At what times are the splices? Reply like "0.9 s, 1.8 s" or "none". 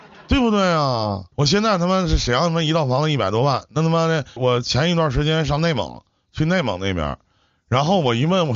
1.3 s, 4.4 s